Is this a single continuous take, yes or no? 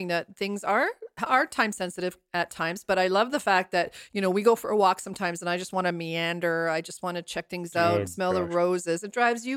yes